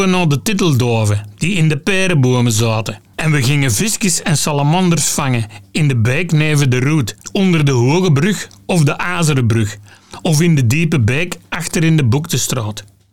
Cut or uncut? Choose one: cut